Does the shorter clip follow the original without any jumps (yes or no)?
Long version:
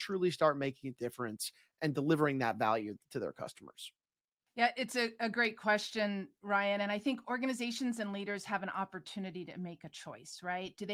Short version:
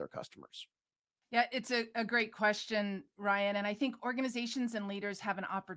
yes